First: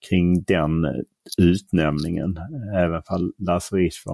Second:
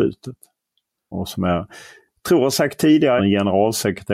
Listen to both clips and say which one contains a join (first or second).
second